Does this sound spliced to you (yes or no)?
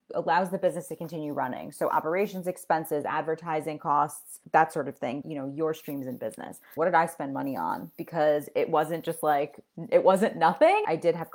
yes